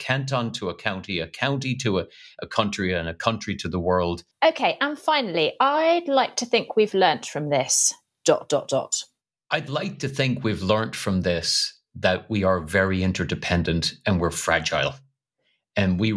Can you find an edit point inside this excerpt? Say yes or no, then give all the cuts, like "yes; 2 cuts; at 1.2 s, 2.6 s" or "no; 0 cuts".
yes; 1 cut; at 4.3 s